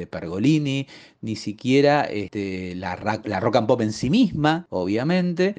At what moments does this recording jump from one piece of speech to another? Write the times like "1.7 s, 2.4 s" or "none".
none